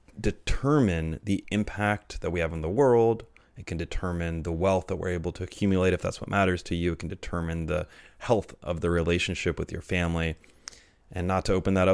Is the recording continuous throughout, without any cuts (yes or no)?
no